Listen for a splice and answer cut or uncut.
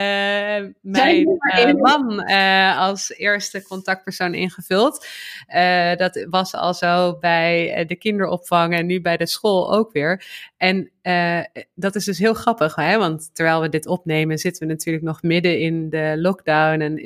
uncut